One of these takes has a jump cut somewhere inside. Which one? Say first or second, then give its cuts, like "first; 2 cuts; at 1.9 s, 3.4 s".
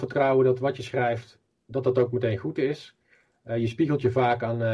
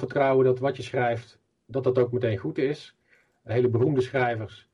second; 1 cut; at 3.5 s